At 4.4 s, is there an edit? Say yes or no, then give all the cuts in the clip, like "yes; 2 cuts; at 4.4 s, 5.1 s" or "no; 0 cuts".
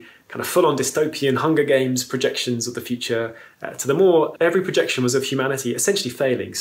yes; 1 cut; at 4.4 s